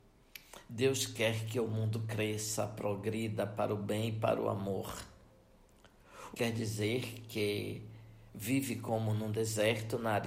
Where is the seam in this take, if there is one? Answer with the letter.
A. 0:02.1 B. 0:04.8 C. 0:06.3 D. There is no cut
C